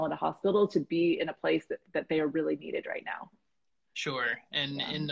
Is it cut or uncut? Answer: uncut